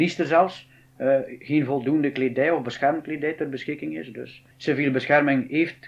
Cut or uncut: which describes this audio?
cut